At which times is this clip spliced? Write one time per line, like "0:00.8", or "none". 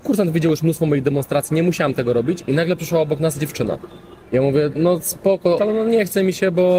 0:04.2
0:05.6